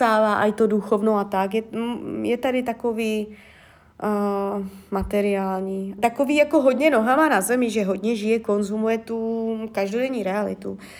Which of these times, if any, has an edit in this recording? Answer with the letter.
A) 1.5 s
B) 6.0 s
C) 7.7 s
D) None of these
B